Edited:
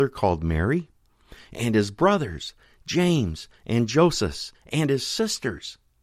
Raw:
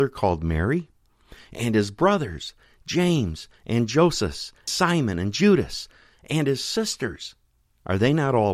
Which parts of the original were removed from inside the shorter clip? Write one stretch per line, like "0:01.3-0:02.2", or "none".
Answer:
0:04.5-0:06.1